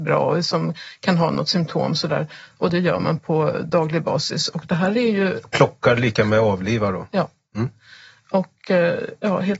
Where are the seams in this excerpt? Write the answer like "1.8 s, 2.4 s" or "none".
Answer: none